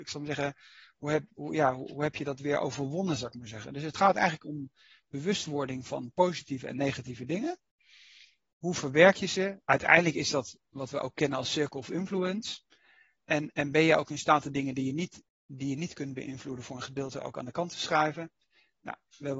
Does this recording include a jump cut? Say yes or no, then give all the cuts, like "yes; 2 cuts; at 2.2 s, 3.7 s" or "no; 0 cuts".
no; 0 cuts